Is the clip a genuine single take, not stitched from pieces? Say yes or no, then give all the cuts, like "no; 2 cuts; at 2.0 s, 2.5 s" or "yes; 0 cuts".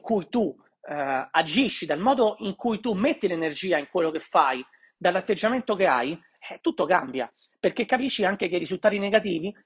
yes; 0 cuts